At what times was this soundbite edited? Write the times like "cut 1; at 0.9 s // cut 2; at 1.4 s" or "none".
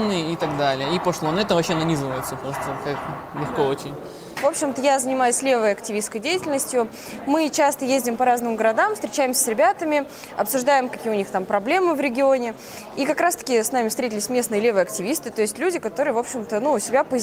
cut 1; at 13.0 s